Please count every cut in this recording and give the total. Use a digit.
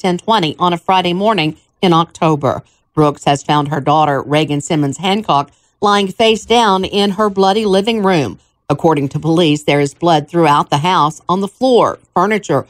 1